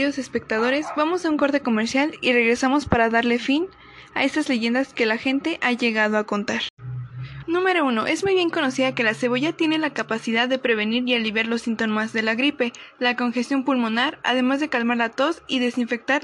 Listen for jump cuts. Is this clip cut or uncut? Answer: cut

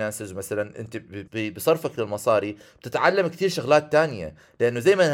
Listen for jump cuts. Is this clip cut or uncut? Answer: cut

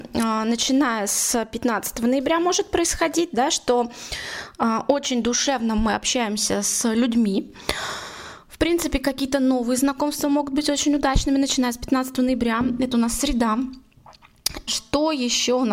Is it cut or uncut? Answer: cut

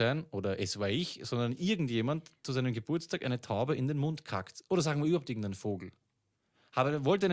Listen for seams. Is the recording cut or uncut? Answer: uncut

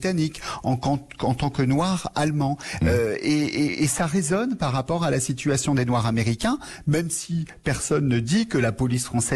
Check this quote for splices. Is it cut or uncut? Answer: uncut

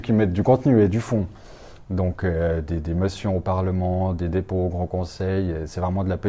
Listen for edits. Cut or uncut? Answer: uncut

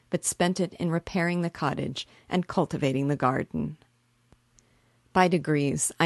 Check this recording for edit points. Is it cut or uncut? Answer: uncut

